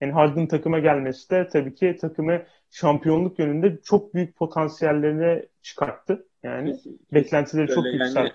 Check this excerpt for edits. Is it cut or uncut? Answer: uncut